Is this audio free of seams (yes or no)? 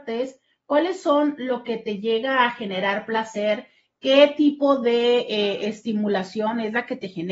yes